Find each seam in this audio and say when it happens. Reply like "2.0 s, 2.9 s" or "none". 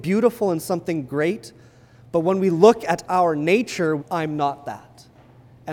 4.0 s